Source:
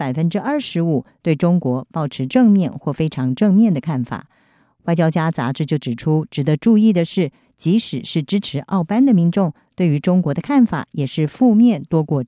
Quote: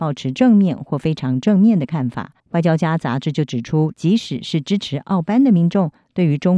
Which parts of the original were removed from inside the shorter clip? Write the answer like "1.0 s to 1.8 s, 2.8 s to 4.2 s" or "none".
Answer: 4.3 s to 4.7 s, 6.3 s to 7.5 s